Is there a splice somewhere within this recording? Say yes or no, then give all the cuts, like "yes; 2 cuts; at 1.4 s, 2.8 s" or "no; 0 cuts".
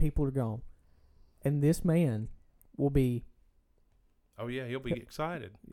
no; 0 cuts